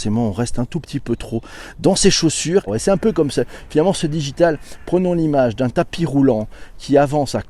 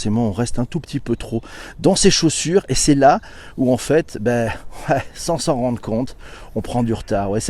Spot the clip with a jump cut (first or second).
first